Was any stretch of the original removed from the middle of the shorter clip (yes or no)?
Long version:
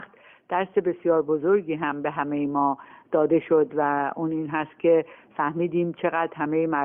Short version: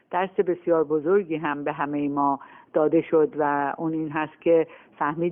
no